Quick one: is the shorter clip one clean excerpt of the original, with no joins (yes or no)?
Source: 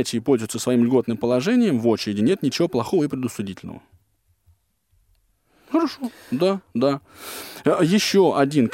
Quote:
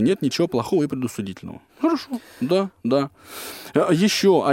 no